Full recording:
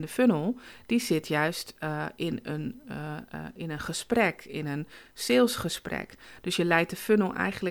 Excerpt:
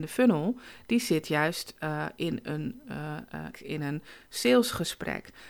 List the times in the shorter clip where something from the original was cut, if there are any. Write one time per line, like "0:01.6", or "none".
0:03.5